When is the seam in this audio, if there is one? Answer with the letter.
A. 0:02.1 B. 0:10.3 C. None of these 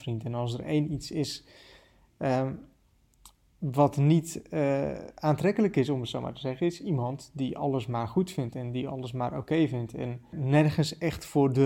B